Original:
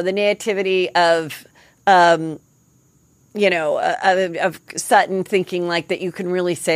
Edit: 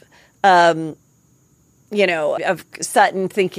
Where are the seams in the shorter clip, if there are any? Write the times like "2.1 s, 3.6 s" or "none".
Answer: 2.4 s